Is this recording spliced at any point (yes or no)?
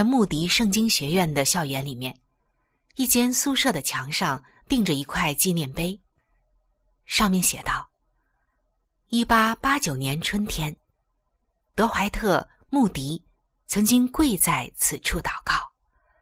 no